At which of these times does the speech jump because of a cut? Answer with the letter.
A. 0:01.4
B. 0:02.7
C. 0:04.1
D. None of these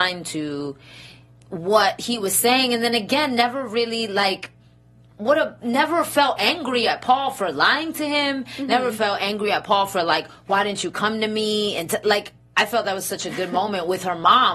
D